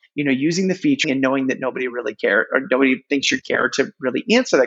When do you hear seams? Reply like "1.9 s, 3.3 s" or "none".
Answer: 1.0 s